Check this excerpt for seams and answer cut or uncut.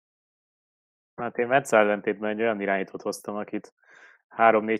uncut